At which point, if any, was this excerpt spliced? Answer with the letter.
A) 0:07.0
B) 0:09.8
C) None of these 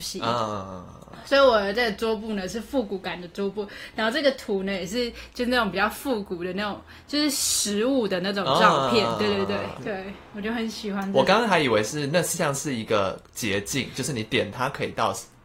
B